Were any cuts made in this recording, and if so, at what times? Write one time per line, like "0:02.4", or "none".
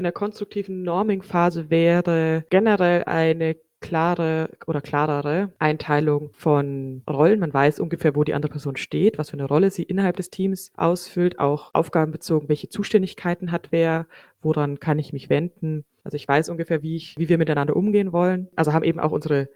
0:16.0